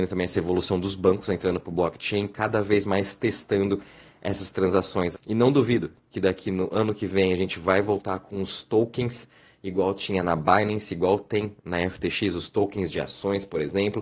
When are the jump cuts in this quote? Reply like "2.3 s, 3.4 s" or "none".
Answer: 5.1 s

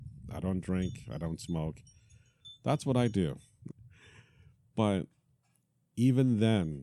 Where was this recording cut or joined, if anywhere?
3.7 s

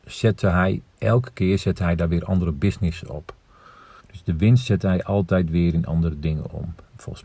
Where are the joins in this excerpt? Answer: 4.0 s

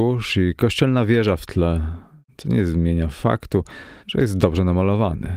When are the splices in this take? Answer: 4.0 s

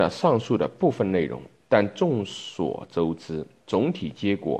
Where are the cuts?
none

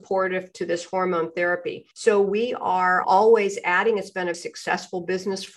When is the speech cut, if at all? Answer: 1.9 s, 3.0 s, 4.3 s

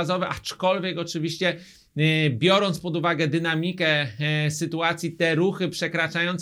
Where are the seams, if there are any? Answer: none

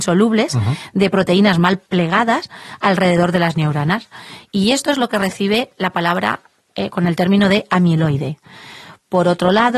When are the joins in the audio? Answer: 1.9 s

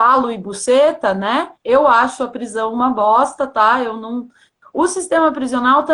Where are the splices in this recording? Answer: 1.6 s, 4.6 s

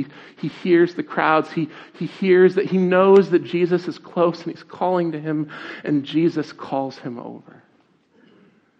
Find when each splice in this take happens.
none

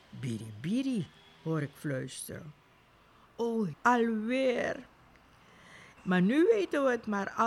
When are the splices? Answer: 3.7 s, 6.0 s

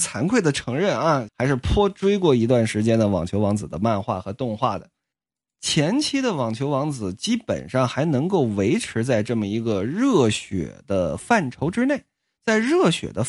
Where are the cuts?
1.3 s

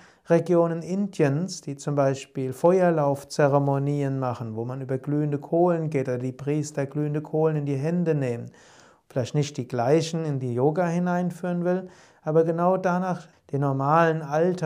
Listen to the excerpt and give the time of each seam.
9.0 s, 13.3 s

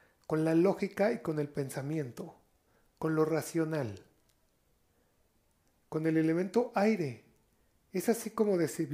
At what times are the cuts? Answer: none

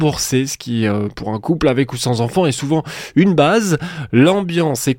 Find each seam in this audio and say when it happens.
4.1 s

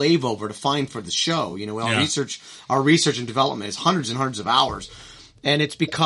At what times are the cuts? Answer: none

